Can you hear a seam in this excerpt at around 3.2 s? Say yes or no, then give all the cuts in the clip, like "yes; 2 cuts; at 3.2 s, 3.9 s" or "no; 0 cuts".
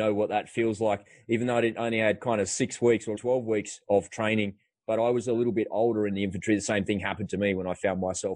yes; 1 cut; at 3.2 s